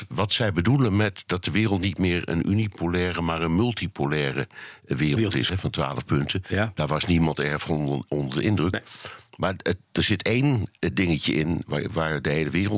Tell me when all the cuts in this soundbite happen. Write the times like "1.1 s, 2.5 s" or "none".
5.5 s

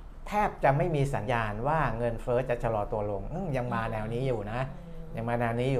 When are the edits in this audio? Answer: 1.3 s

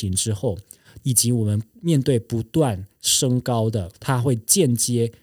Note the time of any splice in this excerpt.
1.0 s, 3.9 s

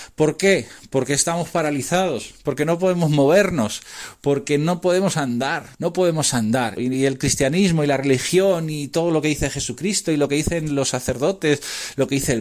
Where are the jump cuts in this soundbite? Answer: 5.7 s, 6.8 s

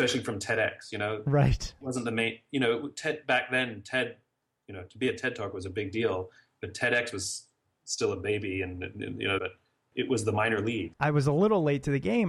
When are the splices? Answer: 9.4 s, 10.9 s

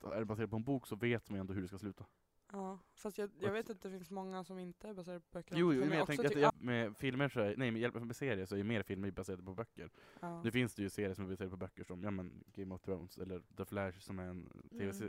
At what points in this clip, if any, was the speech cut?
6.5 s, 13.5 s

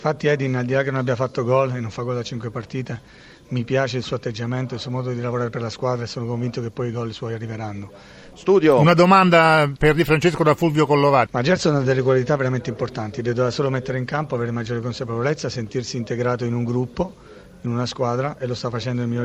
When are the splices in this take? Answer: 8.3 s, 11.3 s

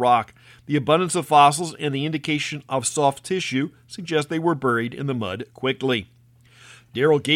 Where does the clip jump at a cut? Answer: 5.5 s

